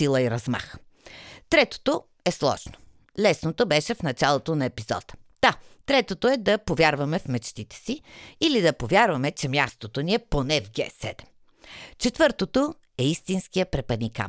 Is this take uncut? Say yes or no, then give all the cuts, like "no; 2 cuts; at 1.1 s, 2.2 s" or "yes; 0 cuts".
yes; 0 cuts